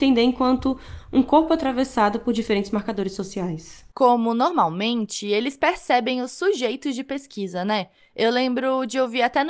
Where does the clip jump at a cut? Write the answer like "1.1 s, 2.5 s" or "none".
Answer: none

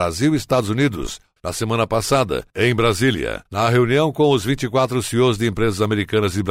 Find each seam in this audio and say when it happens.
1.4 s, 2.5 s

